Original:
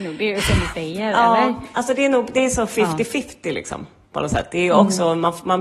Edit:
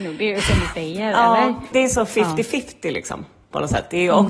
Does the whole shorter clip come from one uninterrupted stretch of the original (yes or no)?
no